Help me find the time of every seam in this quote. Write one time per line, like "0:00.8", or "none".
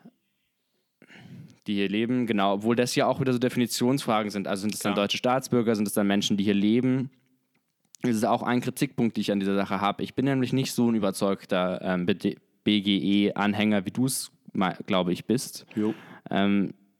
none